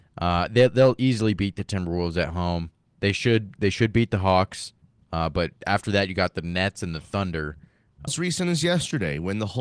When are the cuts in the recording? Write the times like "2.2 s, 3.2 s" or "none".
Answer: 5.6 s, 8.1 s

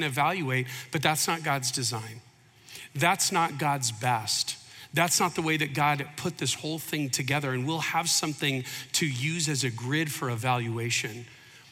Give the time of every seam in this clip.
none

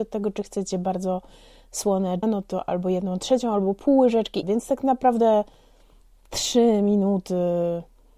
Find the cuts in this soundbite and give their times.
2.2 s, 4.4 s

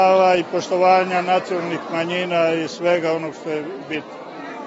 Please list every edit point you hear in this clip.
none

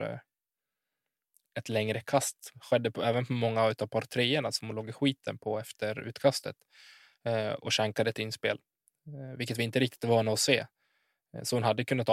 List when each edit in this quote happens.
none

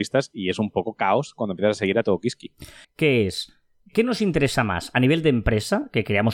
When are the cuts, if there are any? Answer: 2.8 s

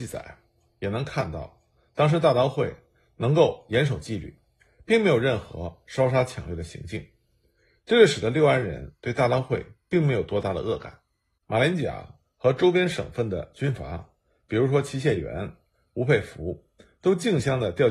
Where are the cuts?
11.4 s

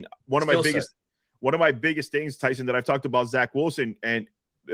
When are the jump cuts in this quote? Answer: none

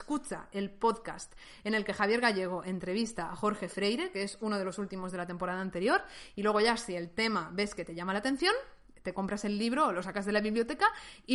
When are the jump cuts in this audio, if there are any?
none

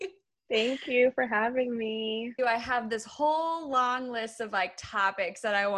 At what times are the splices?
2.4 s

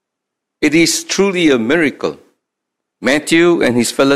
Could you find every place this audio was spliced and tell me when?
2.8 s

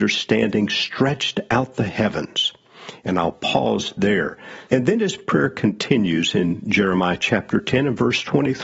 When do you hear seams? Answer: 4.7 s

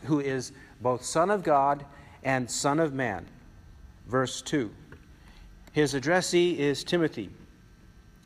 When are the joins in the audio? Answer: 3.9 s

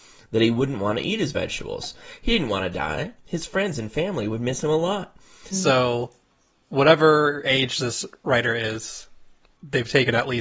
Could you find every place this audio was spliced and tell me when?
5.5 s

